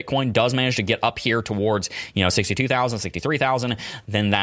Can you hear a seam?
no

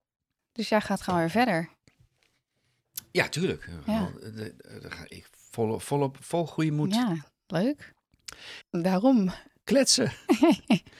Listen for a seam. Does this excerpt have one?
yes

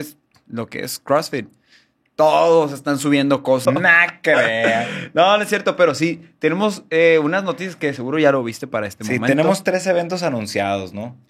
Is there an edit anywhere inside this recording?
yes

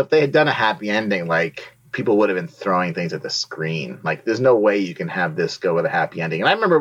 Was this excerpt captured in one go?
yes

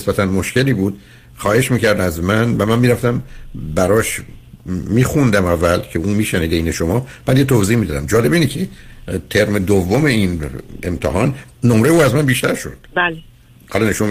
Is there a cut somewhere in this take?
yes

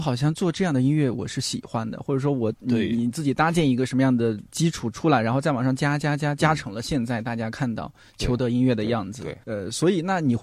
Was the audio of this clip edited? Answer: yes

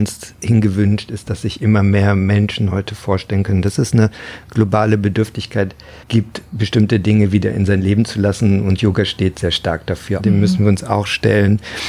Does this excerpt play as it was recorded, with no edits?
no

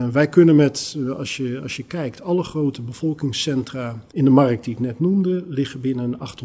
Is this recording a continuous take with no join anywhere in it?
no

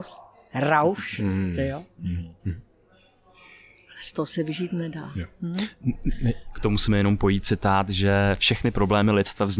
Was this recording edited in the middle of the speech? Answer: yes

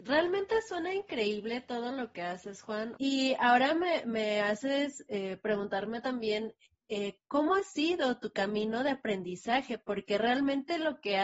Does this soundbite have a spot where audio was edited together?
yes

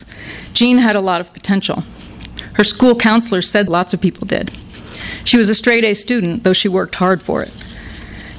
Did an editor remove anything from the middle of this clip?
yes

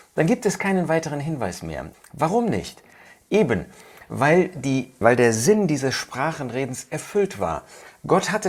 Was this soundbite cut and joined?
yes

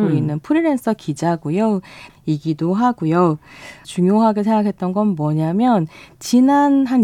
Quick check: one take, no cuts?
no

